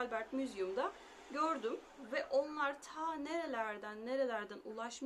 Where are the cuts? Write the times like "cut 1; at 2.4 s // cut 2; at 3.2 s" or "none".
none